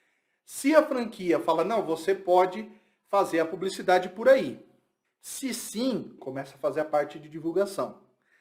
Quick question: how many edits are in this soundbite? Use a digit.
2